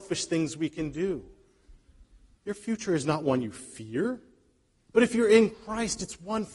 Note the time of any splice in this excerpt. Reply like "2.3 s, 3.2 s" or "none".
2.3 s